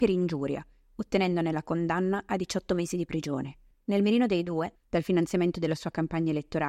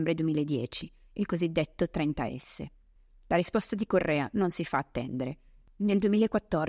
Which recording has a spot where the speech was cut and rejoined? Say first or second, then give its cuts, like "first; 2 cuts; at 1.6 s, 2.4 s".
first; 2 cuts; at 3.7 s, 4.8 s